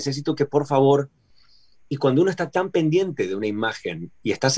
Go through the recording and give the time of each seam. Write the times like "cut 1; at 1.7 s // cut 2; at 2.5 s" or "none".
none